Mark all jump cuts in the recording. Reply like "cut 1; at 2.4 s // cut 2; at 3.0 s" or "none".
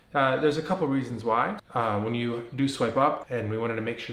cut 1; at 1.6 s // cut 2; at 3.2 s